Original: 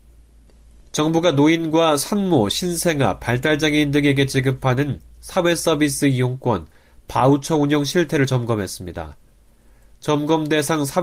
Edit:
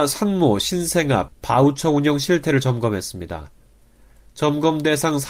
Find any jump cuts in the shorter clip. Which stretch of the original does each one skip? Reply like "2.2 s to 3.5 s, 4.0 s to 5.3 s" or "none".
3.2 s to 6.9 s